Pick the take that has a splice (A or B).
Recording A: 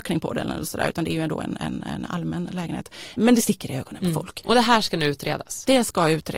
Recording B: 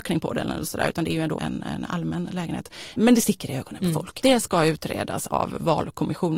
B